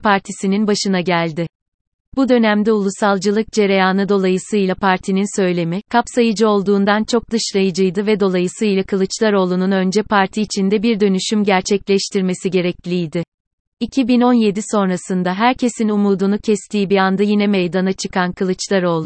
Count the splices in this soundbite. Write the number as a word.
one